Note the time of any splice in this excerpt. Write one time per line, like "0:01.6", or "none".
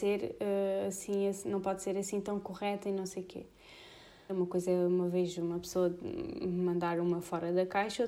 0:04.3